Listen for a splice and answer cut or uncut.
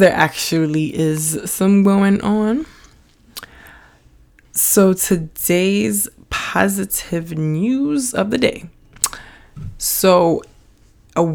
uncut